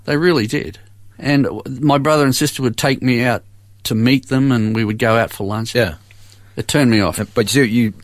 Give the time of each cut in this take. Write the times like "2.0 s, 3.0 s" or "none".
1.1 s, 5.7 s